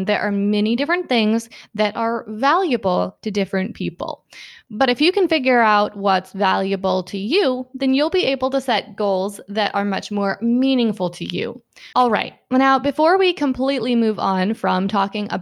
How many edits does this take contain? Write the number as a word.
one